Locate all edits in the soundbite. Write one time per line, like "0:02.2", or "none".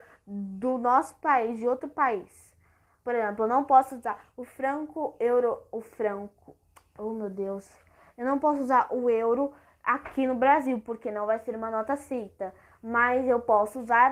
none